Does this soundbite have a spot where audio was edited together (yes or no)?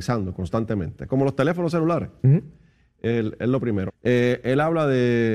yes